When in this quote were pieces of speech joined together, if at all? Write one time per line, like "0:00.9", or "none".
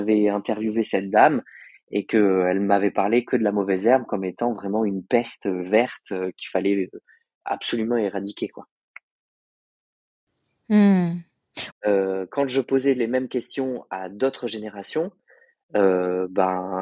0:11.7